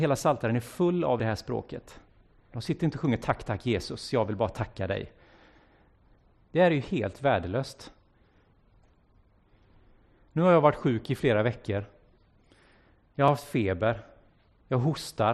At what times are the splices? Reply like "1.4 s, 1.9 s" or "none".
2.5 s, 6.4 s